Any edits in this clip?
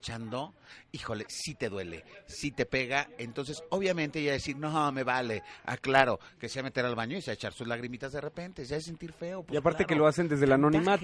yes; 1 cut; at 1.3 s

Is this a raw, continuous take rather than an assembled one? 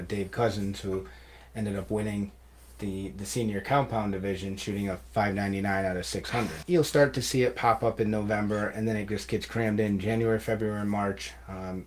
no; 1 cut; at 6.6 s

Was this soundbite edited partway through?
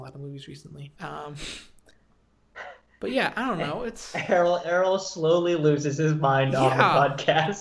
yes; 1 cut; at 1.0 s

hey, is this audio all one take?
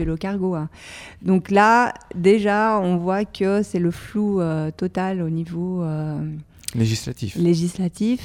yes; 0 cuts

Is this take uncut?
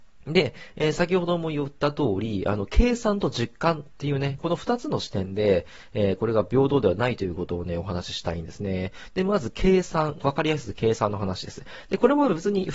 yes; 0 cuts

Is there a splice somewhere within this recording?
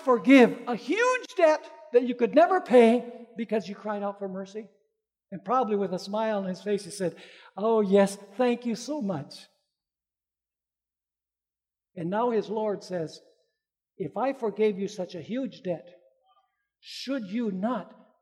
no; 0 cuts

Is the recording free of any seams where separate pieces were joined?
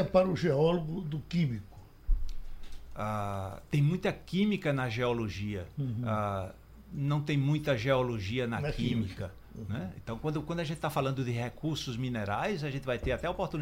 yes; 0 cuts

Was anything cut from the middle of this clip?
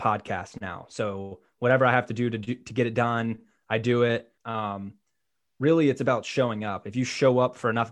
yes; 1 cut; at 4.4 s

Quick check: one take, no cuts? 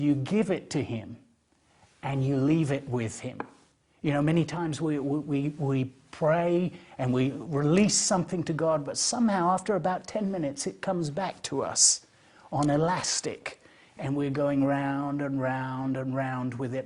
yes; 0 cuts

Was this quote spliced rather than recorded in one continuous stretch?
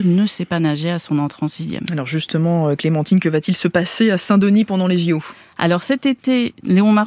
no; 0 cuts

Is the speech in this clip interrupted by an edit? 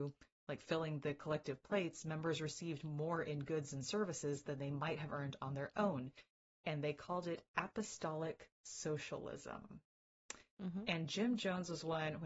no; 0 cuts

